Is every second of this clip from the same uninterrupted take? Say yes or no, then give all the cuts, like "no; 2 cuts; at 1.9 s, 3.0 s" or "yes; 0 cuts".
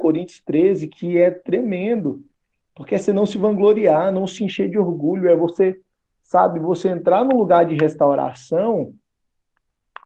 yes; 0 cuts